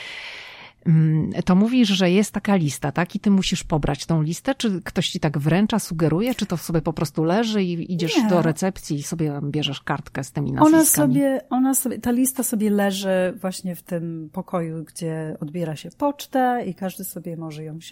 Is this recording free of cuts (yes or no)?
no